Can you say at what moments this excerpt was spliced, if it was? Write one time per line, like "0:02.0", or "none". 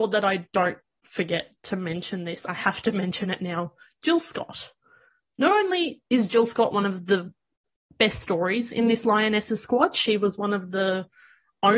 none